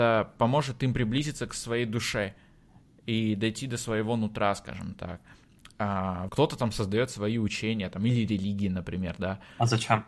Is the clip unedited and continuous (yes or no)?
no